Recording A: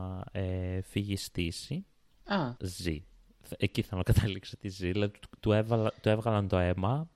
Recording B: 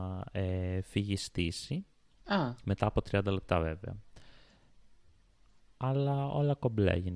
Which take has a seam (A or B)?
A